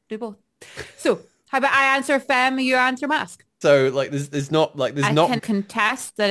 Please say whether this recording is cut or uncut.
cut